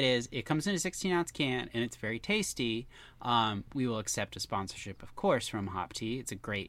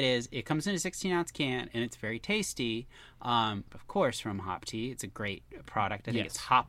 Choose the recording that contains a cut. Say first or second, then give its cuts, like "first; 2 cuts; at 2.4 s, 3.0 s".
second; 1 cut; at 3.7 s